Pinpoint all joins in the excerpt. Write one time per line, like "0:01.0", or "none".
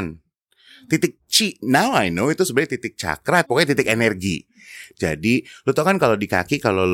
0:03.4
0:04.9